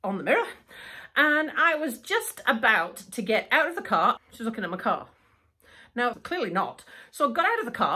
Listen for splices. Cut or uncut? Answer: cut